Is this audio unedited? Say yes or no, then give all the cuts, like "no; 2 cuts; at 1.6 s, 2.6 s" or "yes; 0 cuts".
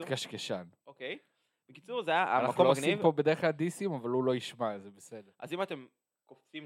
yes; 0 cuts